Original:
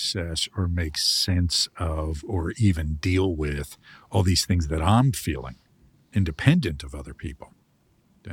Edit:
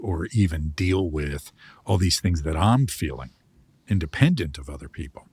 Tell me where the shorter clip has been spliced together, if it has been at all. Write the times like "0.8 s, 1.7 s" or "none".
none